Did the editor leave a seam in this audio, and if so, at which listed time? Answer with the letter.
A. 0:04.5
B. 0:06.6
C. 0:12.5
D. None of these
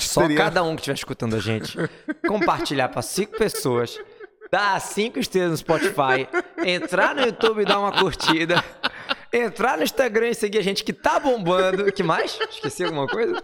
D